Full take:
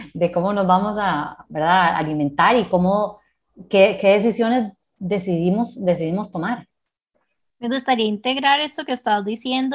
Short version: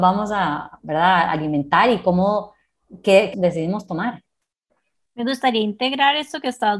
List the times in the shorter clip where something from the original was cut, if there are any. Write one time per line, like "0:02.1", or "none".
0:03.3